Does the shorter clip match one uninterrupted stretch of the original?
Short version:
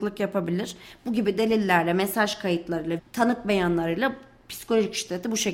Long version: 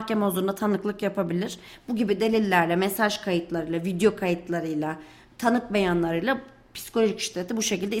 no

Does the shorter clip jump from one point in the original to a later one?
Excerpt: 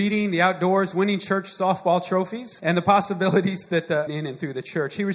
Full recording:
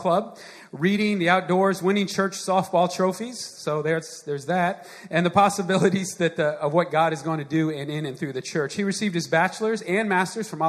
yes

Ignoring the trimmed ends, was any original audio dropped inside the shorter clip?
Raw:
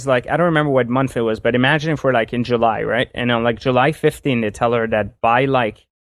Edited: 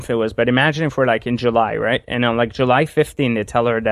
no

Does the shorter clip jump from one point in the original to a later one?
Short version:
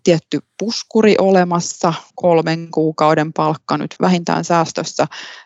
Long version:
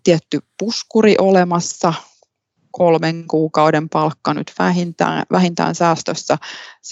yes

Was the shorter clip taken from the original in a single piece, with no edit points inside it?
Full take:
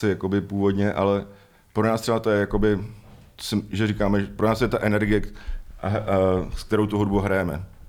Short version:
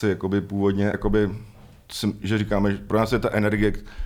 no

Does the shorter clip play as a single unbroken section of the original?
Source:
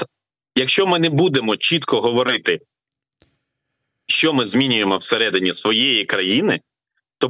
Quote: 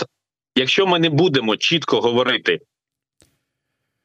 yes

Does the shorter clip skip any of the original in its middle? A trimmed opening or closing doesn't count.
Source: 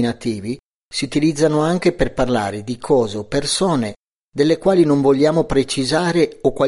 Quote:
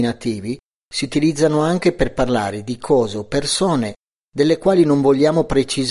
no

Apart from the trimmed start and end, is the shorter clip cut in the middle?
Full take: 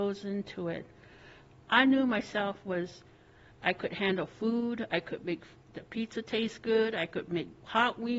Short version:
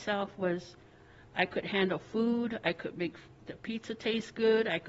no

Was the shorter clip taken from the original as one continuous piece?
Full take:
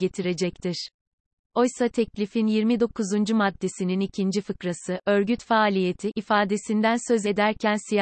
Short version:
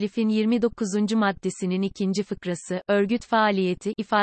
yes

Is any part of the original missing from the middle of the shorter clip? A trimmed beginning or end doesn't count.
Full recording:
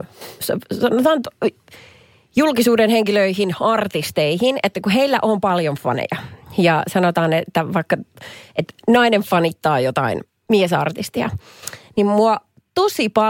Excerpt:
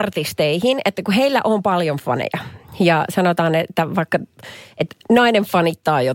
no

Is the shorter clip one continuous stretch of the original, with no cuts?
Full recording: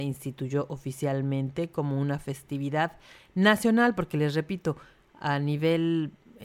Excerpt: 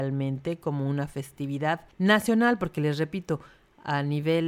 no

